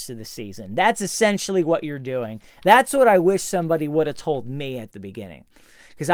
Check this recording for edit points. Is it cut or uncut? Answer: uncut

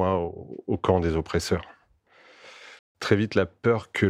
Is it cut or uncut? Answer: cut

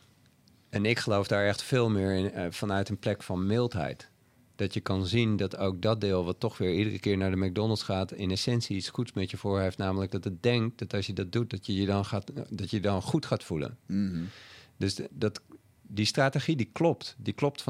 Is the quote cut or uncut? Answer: uncut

